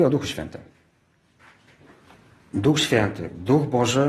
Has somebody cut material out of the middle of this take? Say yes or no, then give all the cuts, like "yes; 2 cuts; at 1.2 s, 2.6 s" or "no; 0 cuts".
no; 0 cuts